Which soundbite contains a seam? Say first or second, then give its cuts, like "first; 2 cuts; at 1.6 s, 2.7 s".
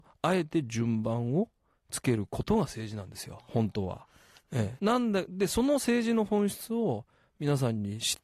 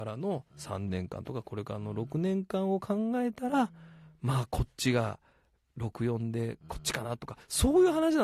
first; 2 cuts; at 3.4 s, 4.8 s